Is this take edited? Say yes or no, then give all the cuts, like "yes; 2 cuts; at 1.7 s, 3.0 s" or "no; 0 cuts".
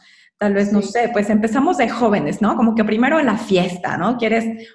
no; 0 cuts